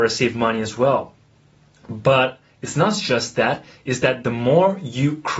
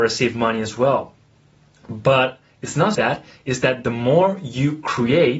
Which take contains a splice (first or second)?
second